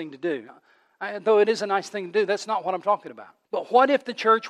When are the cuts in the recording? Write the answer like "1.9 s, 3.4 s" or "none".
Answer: 3.4 s